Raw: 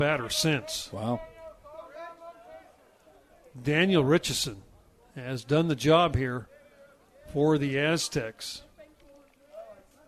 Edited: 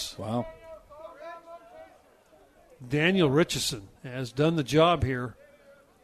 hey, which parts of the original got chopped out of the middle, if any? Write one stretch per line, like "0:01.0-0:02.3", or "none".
0:04.7-0:05.1